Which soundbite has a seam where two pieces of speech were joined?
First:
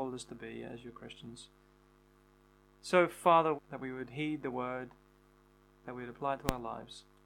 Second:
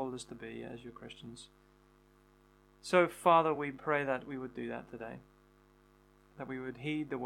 first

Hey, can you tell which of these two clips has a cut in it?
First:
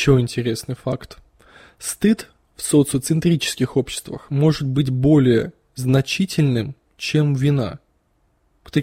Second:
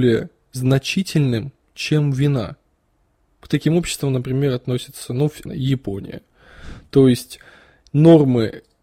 second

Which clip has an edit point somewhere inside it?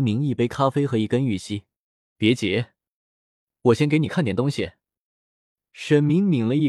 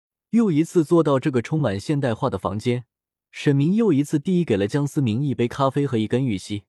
first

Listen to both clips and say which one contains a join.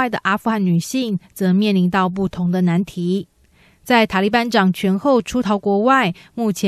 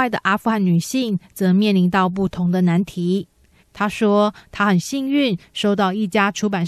second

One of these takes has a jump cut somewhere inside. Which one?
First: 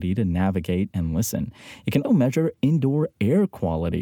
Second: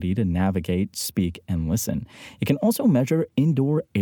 first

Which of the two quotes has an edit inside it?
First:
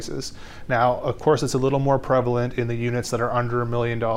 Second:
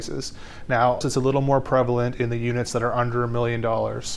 second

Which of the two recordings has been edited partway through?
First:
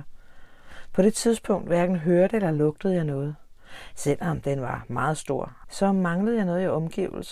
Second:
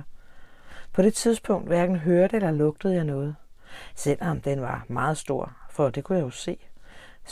first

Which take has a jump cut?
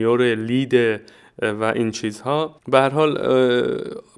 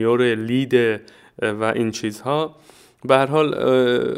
first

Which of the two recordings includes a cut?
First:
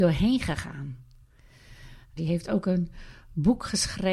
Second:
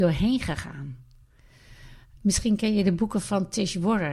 first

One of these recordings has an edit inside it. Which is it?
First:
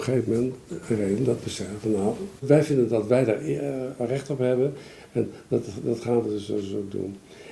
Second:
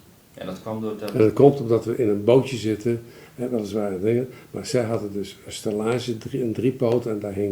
first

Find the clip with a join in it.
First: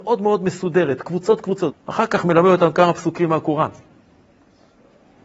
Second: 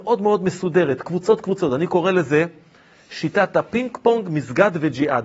first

